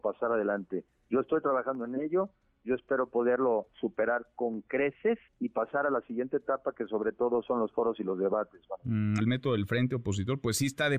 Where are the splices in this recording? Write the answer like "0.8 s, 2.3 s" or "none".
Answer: 5.3 s, 9.2 s